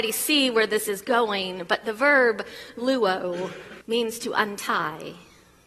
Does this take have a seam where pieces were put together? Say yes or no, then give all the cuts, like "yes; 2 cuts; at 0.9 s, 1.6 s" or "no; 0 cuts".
yes; 1 cut; at 3.8 s